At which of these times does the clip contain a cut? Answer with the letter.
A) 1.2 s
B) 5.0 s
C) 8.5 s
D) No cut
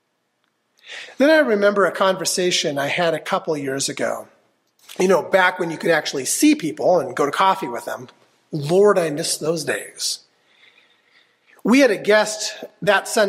D